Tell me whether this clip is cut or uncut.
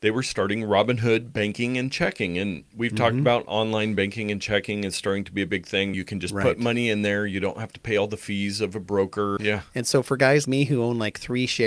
cut